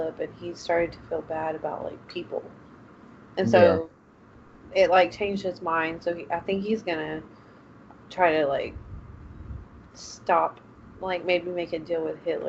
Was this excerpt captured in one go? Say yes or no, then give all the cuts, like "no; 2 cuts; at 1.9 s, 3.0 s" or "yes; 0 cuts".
yes; 0 cuts